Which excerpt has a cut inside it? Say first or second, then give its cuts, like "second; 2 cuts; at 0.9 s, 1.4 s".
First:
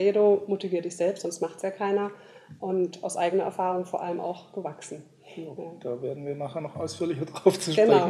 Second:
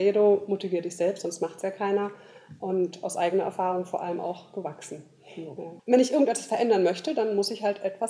second; 1 cut; at 5.8 s